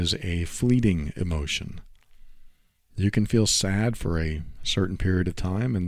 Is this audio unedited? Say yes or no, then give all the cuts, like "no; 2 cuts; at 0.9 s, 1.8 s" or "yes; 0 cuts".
yes; 0 cuts